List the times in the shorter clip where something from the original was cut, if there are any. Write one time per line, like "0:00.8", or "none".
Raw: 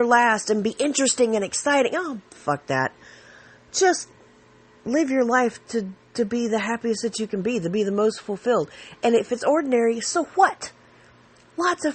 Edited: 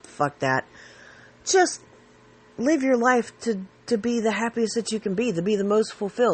none